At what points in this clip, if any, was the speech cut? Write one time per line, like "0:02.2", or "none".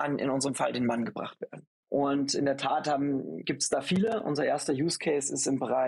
0:01.8